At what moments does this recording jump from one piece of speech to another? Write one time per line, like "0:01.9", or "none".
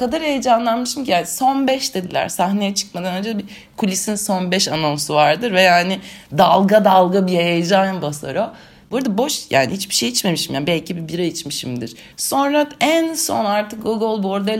0:08.8
0:12.1